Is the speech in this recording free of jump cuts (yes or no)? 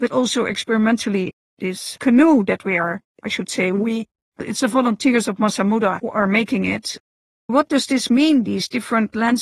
yes